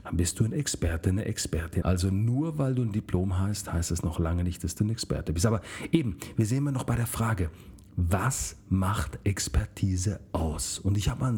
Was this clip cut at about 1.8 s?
yes; 1 cut; at 1.8 s

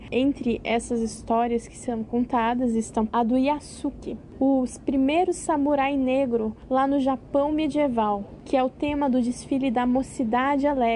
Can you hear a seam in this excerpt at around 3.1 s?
yes; 1 cut; at 3.1 s

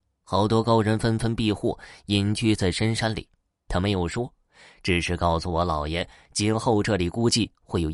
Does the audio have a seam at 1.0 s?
no; 1 cut; at 3.6 s

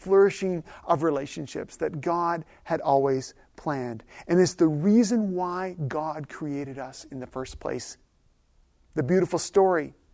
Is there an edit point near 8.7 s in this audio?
no; 0 cuts

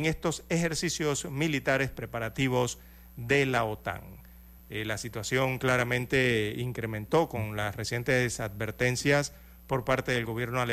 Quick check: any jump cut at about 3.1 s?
no; 1 cut; at 4.6 s

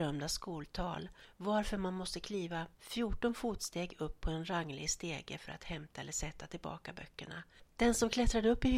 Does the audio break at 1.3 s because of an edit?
yes; 2 cuts; at 1.3 s, 7.6 s

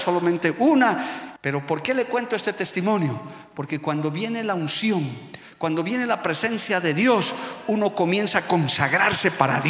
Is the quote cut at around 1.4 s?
yes; 1 cut; at 1.4 s

